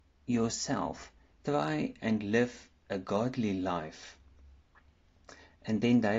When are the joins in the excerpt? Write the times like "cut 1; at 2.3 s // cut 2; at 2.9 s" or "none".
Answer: cut 1; at 1.3 s